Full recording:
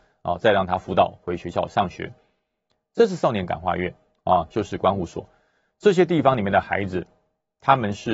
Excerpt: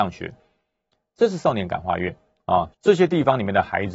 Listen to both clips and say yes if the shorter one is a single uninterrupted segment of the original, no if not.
no